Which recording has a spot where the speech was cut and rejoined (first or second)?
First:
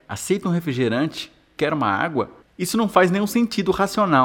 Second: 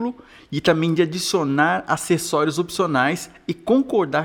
first